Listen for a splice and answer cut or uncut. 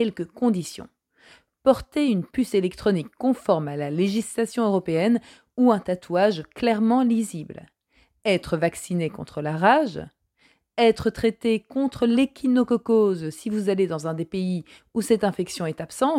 uncut